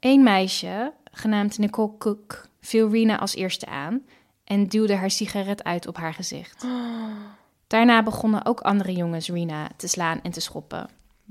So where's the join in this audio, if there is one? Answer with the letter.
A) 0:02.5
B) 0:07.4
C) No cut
A